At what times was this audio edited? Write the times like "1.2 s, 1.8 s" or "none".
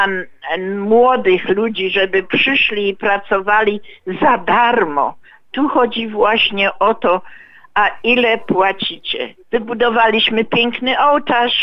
9.4 s